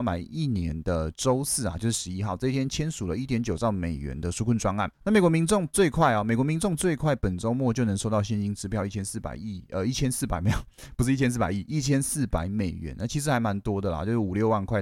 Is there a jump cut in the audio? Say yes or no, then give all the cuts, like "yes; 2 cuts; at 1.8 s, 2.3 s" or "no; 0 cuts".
no; 0 cuts